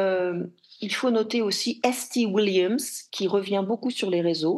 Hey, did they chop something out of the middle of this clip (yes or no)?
no